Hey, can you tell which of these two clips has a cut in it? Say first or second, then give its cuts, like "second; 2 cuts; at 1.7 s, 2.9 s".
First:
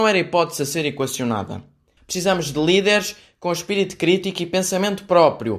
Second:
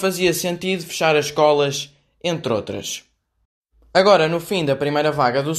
first; 1 cut; at 2.0 s